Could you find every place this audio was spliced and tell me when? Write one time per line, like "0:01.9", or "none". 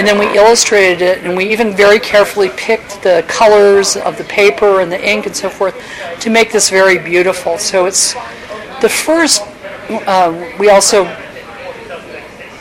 none